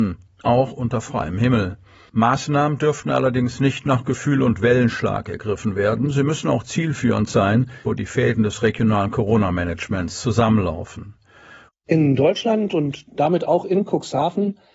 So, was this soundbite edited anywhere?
yes; 2 cuts; at 7.8 s, 11.7 s

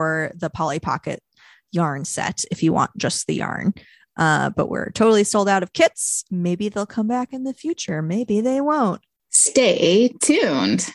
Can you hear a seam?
no; 0 cuts

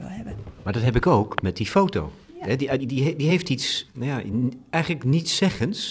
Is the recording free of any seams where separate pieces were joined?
no; 2 cuts; at 2.8 s, 3.9 s

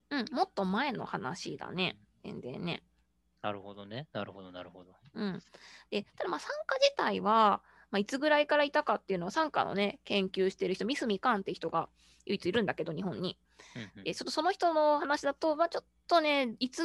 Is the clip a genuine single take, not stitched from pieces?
yes; 0 cuts

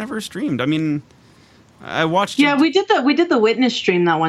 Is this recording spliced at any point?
no; 0 cuts

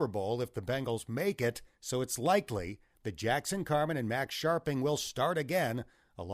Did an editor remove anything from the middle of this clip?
yes; 1 cut; at 1.7 s

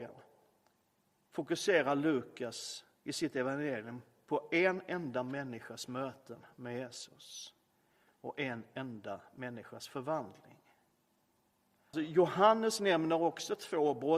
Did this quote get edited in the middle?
yes; 1 cut; at 11.9 s

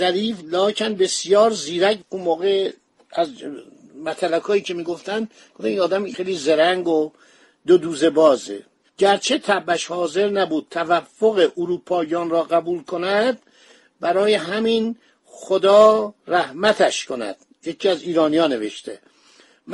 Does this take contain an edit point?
no; 0 cuts

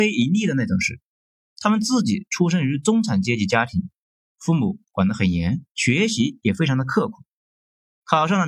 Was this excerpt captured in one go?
no; 1 cut; at 5.7 s

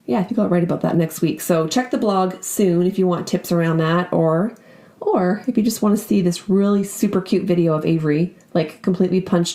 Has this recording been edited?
no; 0 cuts

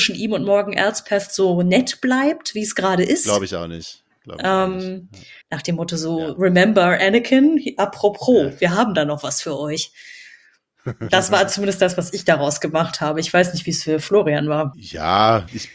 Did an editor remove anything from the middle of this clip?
yes; 1 cut; at 5.4 s

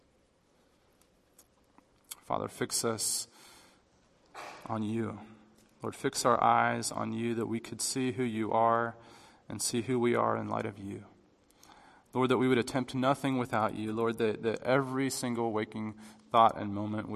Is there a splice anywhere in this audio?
no; 0 cuts

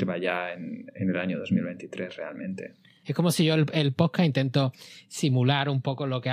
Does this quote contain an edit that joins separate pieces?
yes; 1 cut; at 3.0 s

